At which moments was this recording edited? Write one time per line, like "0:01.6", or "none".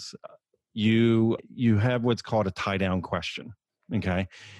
none

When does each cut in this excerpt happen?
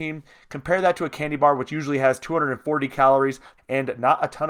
0:03.6

